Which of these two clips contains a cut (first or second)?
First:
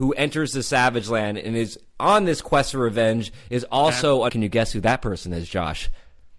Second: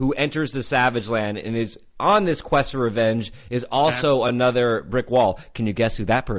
first